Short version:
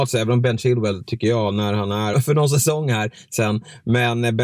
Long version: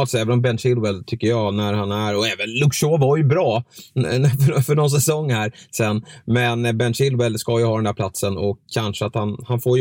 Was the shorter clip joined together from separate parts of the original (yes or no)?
yes